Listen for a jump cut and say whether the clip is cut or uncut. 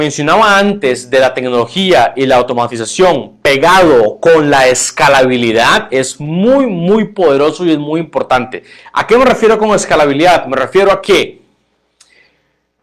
uncut